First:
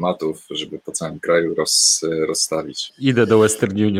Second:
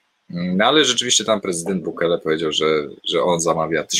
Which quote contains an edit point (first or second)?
first